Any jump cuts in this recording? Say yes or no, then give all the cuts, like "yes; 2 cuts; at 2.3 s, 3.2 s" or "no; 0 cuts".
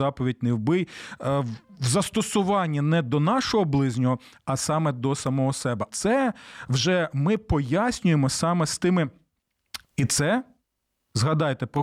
yes; 2 cuts; at 5.9 s, 9.8 s